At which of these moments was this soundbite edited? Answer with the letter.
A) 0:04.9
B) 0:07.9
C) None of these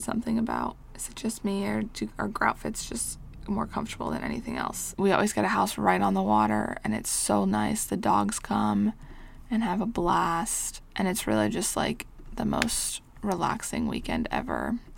A